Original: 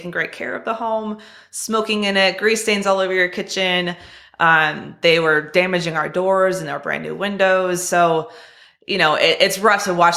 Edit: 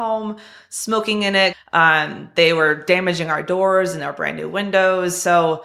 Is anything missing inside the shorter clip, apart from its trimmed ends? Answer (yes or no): yes